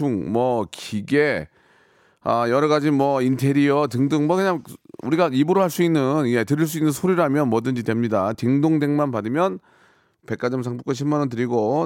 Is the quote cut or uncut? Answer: uncut